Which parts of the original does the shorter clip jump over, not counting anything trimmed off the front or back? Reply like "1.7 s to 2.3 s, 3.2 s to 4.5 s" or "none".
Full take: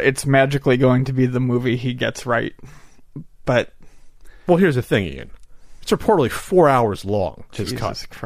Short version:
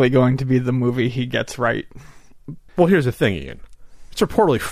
3.4 s to 4.4 s